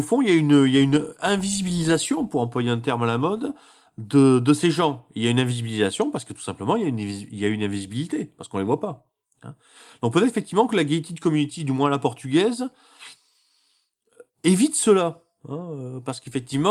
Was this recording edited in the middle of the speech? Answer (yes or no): no